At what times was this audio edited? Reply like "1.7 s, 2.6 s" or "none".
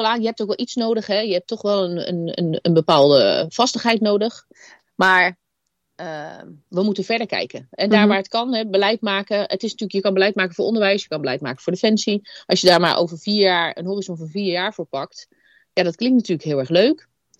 none